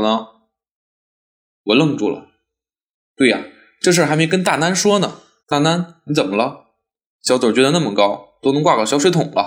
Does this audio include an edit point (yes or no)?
yes